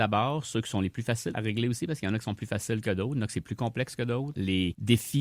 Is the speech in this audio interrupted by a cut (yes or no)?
yes